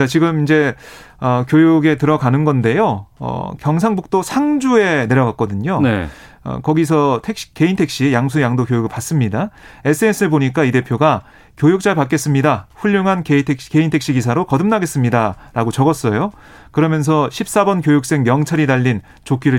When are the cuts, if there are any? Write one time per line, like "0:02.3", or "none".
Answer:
none